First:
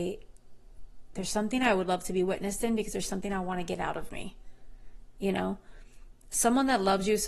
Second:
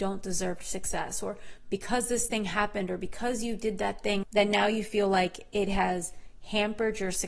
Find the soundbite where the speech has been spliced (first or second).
second